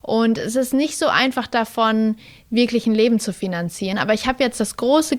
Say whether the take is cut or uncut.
uncut